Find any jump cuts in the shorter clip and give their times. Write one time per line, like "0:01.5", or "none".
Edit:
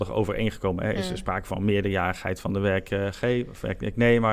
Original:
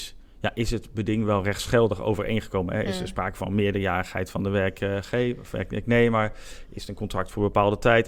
none